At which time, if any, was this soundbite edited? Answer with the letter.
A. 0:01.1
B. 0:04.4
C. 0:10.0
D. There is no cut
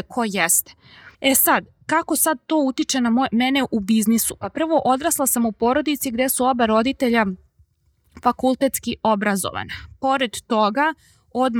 A